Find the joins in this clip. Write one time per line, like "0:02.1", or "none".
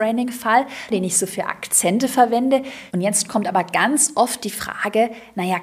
0:00.9
0:02.9